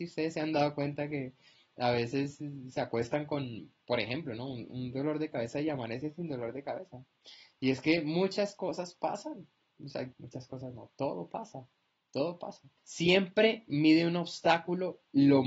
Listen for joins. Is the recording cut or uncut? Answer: cut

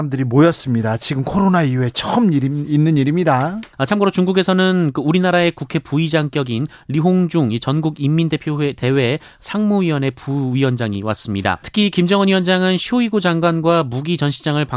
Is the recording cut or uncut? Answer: cut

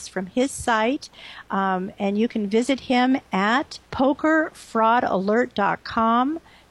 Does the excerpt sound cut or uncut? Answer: cut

